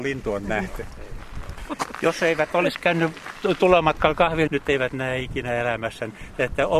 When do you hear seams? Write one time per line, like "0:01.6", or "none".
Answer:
0:01.6
0:04.5

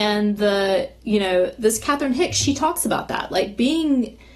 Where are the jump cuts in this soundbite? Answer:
none

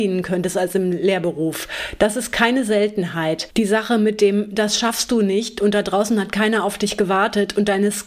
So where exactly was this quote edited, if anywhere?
none

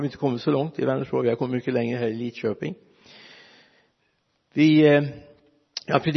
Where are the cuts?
none

